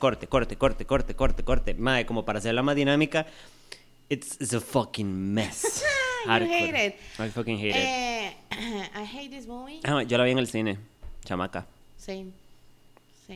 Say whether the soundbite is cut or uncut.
uncut